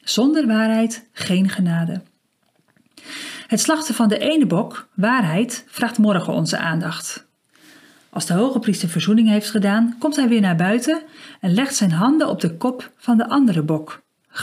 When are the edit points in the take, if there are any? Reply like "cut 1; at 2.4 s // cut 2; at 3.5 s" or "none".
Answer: none

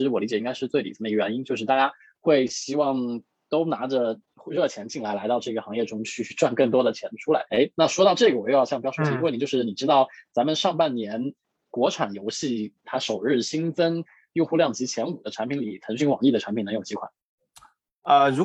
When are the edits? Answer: cut 1; at 7.5 s // cut 2; at 12.8 s

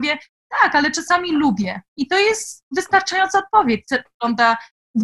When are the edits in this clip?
cut 1; at 4.1 s

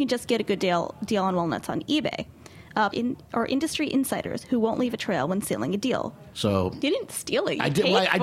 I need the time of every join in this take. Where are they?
cut 1; at 2.9 s // cut 2; at 6.3 s

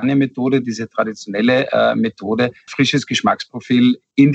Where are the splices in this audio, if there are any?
cut 1; at 2.7 s

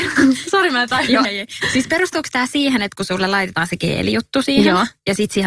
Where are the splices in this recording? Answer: cut 1; at 1.2 s

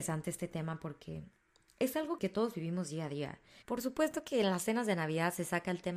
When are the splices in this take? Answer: cut 1; at 2.2 s // cut 2; at 3.6 s

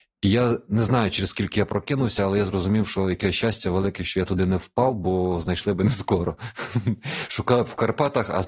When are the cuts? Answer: none

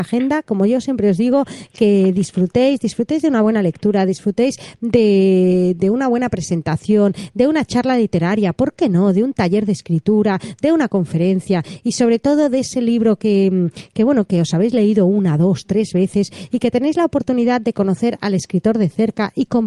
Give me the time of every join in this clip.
none

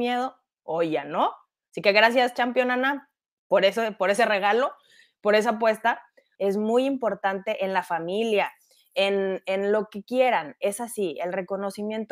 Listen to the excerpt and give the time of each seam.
cut 1; at 6.4 s

